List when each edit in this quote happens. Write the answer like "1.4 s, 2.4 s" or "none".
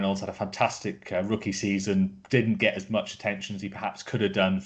none

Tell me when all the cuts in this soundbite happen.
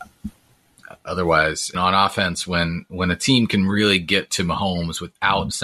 1.7 s

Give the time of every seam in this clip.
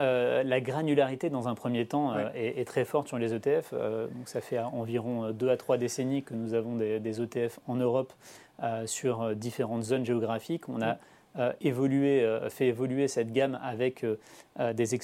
none

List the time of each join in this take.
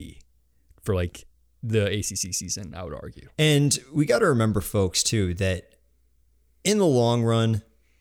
none

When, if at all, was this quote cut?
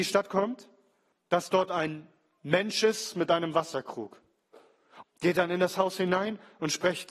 1.1 s, 5.0 s

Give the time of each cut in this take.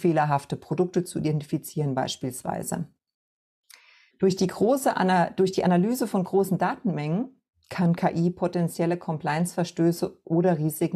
4.1 s

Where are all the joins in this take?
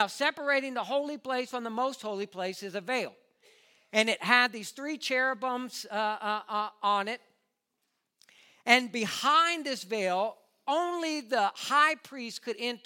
none

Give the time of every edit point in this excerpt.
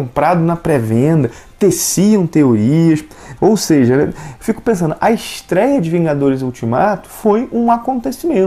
3.4 s

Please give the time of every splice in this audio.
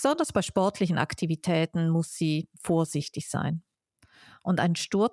none

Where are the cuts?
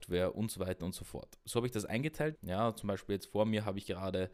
2.4 s

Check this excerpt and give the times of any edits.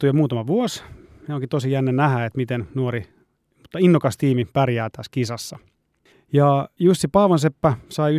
none

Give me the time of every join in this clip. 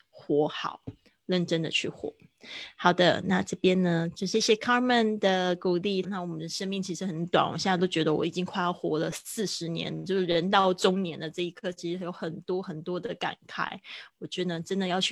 4.3 s, 6.0 s

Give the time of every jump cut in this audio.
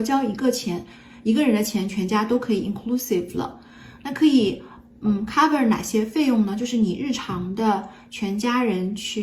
none

